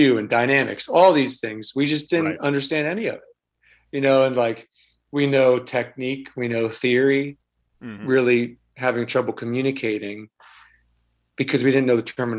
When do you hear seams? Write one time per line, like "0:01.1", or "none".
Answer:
0:08.0